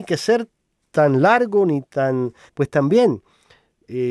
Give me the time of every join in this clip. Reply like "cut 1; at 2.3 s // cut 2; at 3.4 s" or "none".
cut 1; at 2.5 s

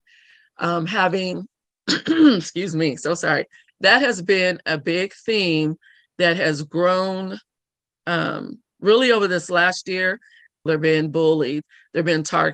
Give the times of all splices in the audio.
cut 1; at 3.7 s // cut 2; at 10.7 s

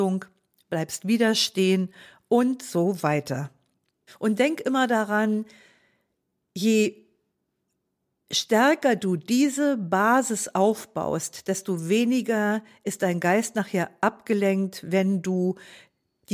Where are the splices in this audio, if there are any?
cut 1; at 4.1 s

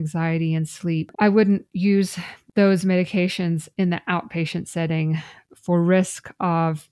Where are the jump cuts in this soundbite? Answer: cut 1; at 1.1 s

